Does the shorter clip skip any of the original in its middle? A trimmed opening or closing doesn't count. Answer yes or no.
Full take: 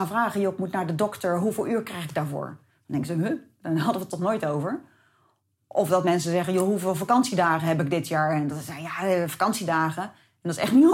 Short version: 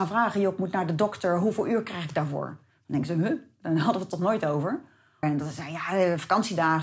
yes